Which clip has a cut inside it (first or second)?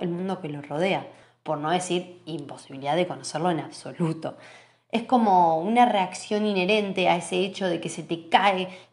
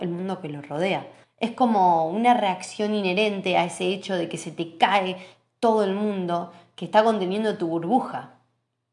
second